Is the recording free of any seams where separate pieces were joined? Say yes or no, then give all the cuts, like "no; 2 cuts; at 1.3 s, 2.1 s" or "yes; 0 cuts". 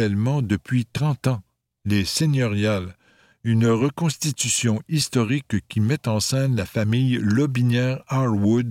yes; 0 cuts